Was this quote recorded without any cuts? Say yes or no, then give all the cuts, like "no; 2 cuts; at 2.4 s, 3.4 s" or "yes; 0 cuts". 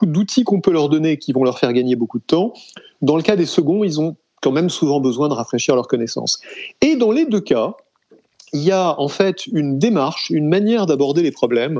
yes; 0 cuts